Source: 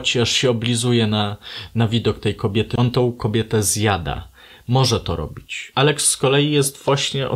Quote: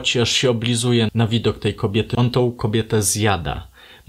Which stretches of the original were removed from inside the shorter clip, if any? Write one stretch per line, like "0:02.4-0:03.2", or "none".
0:01.1-0:01.7